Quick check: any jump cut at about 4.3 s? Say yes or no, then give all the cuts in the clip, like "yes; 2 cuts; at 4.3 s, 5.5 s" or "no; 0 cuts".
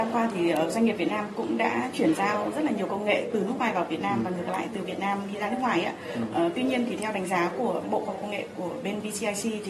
no; 0 cuts